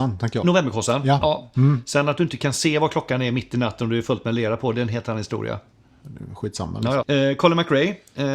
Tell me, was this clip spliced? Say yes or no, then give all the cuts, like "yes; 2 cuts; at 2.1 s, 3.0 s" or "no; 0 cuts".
yes; 2 cuts; at 1.2 s, 7.0 s